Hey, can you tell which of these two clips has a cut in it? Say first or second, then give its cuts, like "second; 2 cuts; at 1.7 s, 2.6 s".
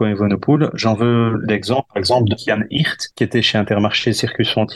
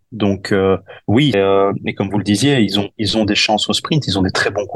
second; 1 cut; at 1.3 s